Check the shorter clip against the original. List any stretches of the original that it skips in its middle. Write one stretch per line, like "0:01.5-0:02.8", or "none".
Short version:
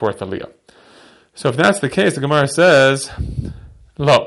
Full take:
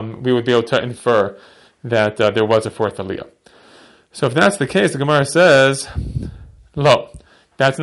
none